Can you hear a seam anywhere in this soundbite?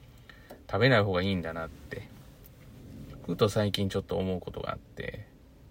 no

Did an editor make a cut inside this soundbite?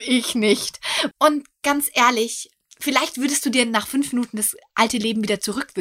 yes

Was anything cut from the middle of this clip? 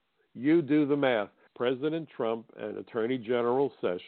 yes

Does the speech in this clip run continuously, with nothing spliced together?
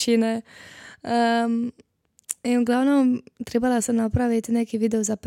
yes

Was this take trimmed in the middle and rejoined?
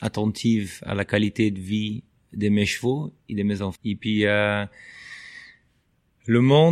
yes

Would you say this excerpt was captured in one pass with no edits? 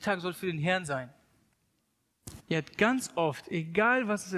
no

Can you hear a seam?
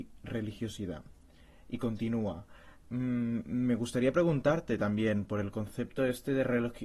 no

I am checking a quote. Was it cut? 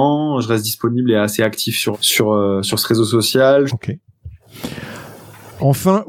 yes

